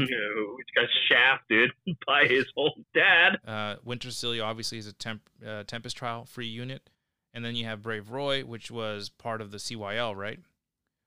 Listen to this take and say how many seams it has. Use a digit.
1